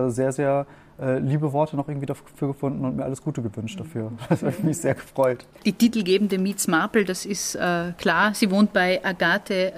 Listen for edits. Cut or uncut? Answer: cut